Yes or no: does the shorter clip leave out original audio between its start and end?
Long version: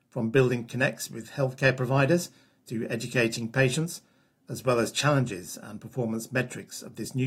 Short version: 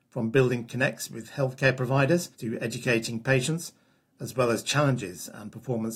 yes